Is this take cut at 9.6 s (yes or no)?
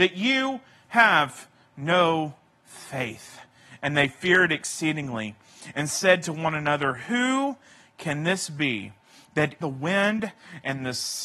yes